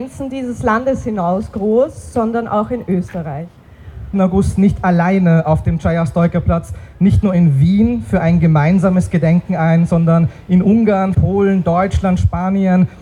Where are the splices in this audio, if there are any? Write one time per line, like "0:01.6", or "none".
0:04.1
0:11.1